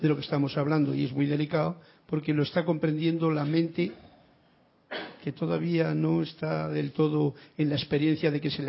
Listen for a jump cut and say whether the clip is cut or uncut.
uncut